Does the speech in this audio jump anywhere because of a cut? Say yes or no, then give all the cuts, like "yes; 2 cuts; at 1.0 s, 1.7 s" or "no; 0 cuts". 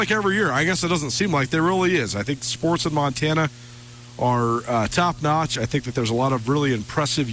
no; 0 cuts